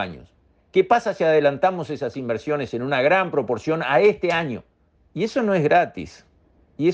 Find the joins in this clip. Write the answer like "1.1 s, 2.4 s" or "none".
4.9 s

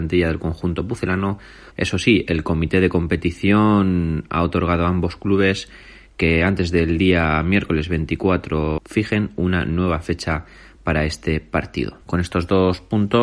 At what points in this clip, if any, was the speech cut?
1.7 s, 8.8 s, 12.0 s

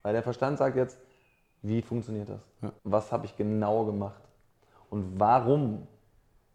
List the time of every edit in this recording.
2.8 s

